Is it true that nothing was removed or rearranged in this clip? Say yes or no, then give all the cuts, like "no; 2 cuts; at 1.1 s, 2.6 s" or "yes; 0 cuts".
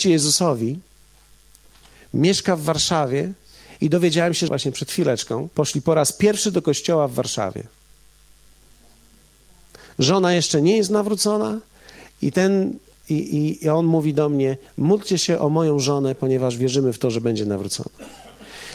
no; 2 cuts; at 4.5 s, 5.5 s